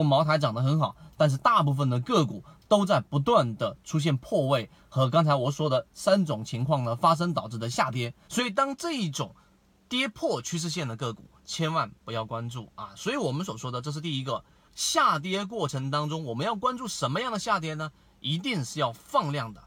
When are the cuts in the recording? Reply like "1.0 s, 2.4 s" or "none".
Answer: 8.3 s, 14.7 s